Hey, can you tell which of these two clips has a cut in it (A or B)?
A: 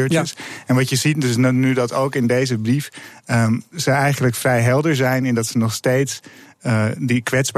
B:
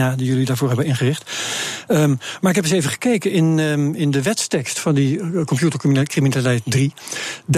A